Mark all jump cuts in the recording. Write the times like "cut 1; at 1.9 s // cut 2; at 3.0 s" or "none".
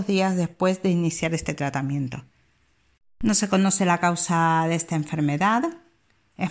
none